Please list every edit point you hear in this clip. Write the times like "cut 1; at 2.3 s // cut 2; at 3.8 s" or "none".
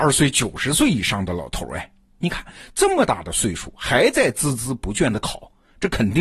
none